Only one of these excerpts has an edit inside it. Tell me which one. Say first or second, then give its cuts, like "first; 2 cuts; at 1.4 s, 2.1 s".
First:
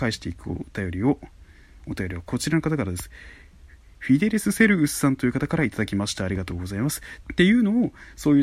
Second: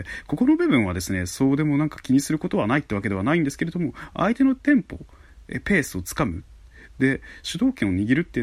first; 1 cut; at 7.2 s